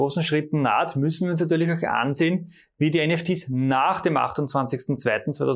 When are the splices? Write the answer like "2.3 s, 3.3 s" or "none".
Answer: none